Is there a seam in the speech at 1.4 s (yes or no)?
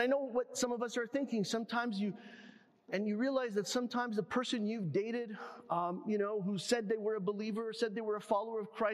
no